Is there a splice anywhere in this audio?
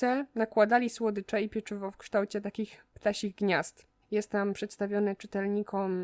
yes; 1 cut; at 4.0 s

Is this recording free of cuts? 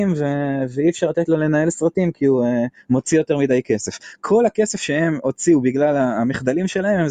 yes; 0 cuts

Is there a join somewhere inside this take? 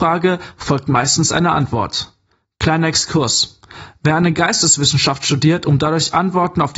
no; 0 cuts

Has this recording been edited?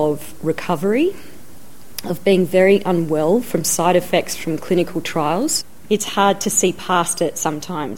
no; 0 cuts

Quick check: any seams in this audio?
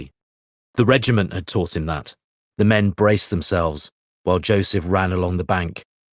yes; 1 cut; at 2.4 s

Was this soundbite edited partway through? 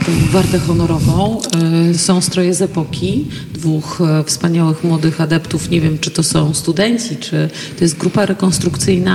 no; 0 cuts

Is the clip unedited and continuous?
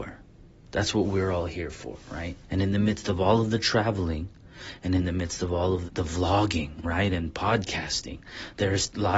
no; 2 cuts; at 2.5 s, 5.9 s

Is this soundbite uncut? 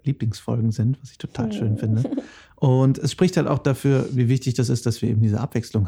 yes; 0 cuts

